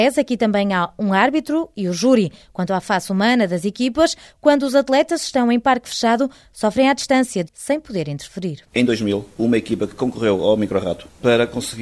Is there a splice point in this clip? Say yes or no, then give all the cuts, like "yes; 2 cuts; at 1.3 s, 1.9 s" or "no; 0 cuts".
yes; 2 cuts; at 7.5 s, 8.7 s